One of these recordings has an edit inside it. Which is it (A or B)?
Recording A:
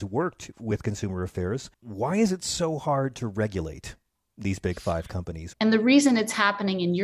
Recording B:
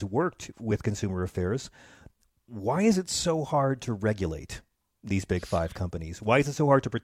A